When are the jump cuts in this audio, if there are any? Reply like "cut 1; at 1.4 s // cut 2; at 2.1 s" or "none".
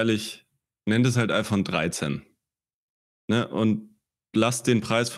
none